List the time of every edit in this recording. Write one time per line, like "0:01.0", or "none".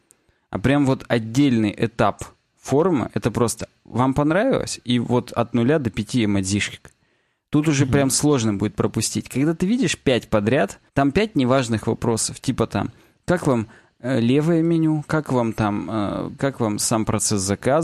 0:10.9
0:16.4